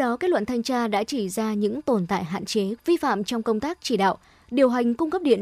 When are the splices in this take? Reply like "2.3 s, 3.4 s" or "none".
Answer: 2.8 s